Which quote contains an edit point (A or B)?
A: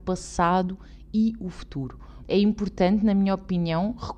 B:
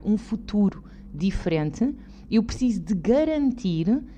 A